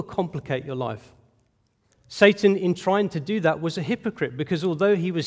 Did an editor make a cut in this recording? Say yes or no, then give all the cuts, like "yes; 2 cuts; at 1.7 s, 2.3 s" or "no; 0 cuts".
yes; 1 cut; at 1.9 s